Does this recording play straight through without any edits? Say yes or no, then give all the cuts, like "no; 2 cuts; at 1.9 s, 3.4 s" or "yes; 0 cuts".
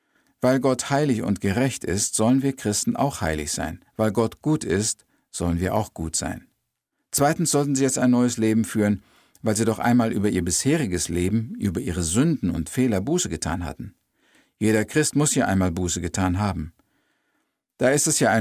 yes; 0 cuts